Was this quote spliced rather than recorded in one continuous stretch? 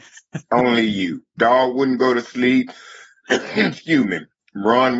yes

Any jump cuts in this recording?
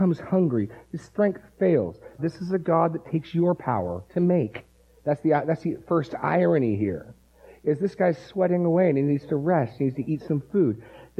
yes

